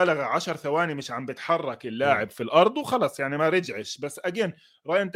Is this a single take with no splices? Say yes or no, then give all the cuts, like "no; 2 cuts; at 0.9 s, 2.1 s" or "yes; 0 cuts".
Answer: yes; 0 cuts